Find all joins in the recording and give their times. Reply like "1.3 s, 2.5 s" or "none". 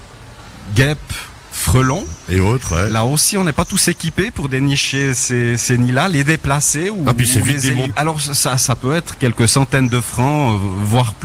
7.9 s